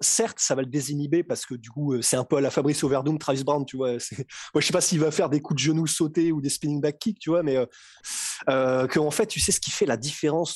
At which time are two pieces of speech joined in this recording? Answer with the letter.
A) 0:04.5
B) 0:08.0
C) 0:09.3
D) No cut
B